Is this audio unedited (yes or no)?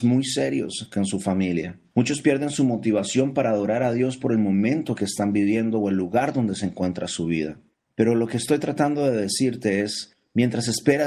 no